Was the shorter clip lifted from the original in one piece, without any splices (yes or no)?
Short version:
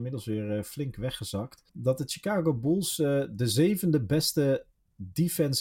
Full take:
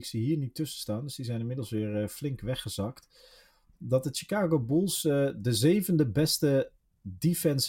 no